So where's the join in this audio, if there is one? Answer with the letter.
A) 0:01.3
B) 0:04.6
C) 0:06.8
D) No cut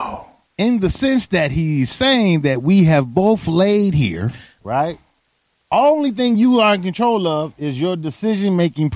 B